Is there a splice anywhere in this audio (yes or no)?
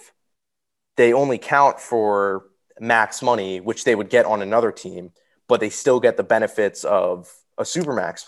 no